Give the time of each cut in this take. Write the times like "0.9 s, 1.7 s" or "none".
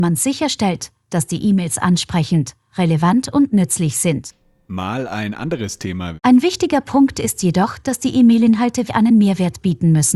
6.2 s, 8.9 s